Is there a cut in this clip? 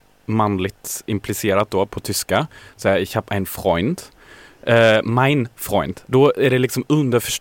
yes; 1 cut; at 6.0 s

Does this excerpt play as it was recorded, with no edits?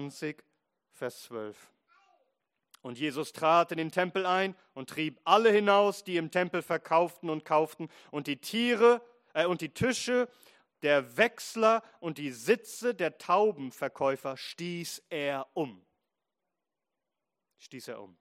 yes; 0 cuts

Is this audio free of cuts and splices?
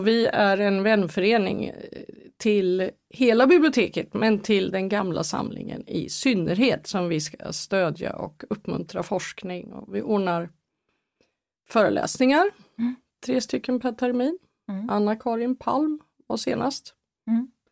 yes; 0 cuts

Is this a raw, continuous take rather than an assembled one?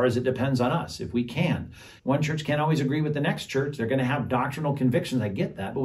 no; 1 cut; at 2.0 s

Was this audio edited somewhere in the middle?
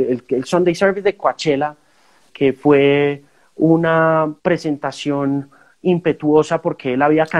yes; 2 cuts; at 2.3 s, 4.4 s

